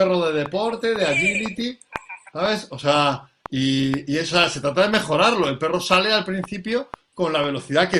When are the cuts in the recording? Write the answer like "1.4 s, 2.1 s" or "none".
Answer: none